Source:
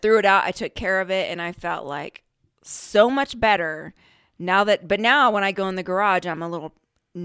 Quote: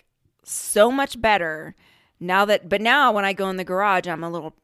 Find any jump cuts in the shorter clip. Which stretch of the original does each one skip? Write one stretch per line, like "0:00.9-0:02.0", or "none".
none